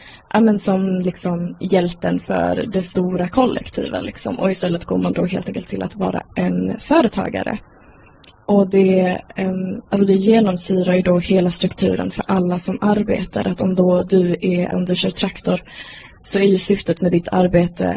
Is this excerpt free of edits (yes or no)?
no